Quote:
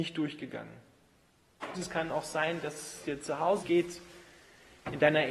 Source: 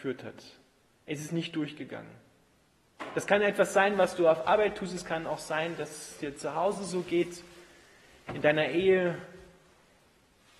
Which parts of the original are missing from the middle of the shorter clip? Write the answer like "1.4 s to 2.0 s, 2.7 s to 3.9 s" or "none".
3.1 s to 4.9 s, 6.8 s to 7.0 s